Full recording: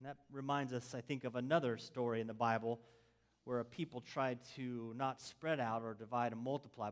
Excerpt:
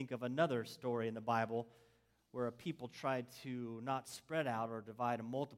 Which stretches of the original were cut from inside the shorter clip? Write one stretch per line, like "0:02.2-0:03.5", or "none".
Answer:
none